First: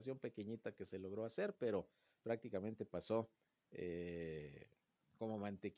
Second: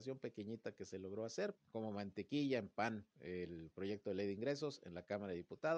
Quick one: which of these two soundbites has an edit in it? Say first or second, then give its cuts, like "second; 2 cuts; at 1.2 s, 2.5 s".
second; 2 cuts; at 1.6 s, 3.1 s